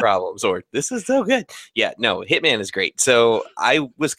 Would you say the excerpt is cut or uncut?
uncut